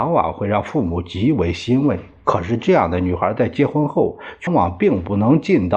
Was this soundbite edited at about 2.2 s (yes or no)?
no